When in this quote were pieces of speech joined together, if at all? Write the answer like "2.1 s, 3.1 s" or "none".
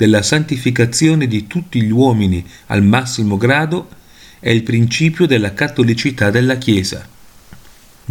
none

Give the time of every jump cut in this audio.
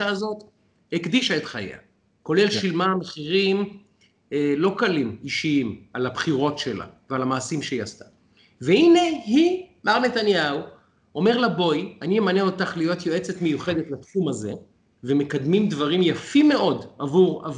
none

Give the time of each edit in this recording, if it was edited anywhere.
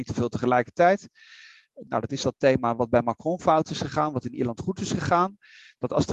1.9 s

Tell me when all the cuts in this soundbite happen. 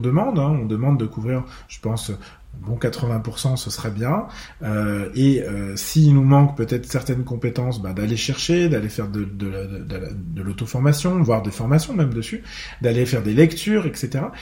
none

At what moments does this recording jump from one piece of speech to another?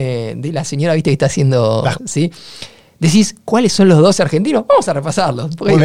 2.0 s

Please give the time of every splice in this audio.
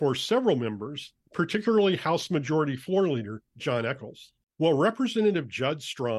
4.5 s

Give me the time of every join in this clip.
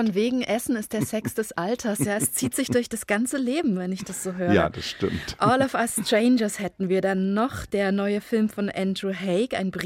none

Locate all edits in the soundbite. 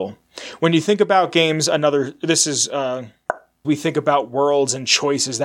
3.6 s

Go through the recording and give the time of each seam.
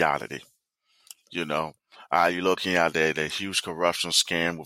none

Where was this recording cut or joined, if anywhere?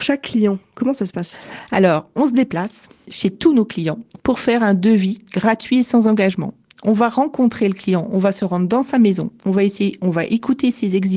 none

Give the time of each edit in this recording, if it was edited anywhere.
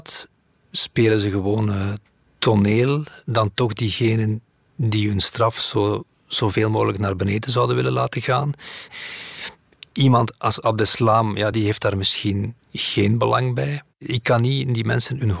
8.9 s, 11.5 s, 12.6 s

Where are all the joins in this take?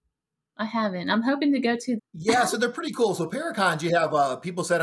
2.0 s

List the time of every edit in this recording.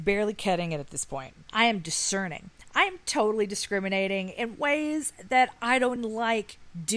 1.5 s, 6.0 s

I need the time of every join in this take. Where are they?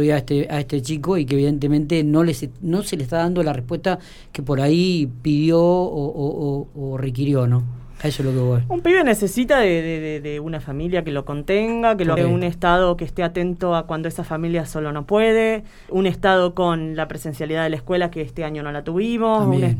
12.2 s, 15.9 s

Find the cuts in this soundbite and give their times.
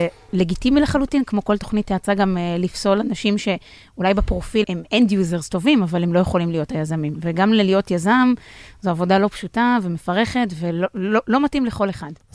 4.6 s

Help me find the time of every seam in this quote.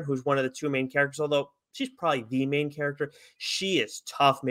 none

